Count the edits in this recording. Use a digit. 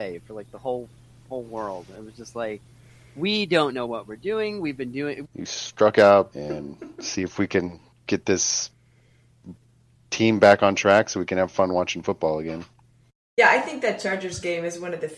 2